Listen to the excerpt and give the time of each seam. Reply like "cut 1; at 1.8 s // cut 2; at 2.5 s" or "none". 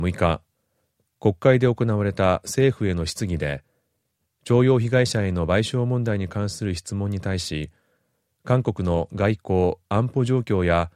none